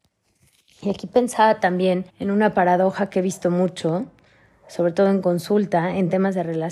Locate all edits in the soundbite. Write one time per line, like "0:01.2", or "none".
0:02.1